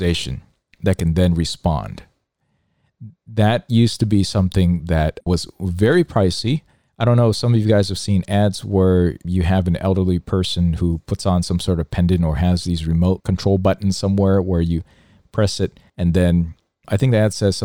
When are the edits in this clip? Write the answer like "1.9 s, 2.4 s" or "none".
15.9 s